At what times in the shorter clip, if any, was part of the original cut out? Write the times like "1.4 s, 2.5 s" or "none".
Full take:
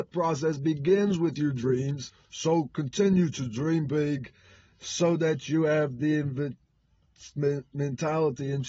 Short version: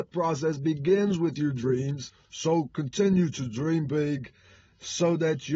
none